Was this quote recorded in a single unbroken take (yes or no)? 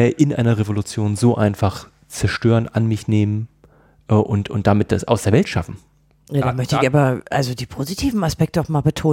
yes